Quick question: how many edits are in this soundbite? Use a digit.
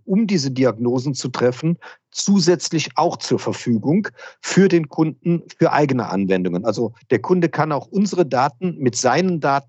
0